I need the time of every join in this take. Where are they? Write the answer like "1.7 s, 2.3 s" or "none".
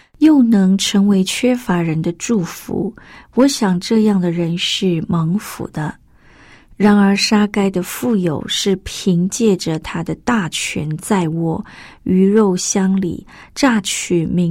none